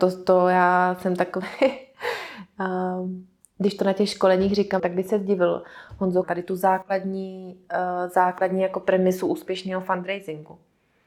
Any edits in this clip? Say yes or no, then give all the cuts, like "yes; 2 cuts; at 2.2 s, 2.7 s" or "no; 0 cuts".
yes; 2 cuts; at 4.8 s, 6.2 s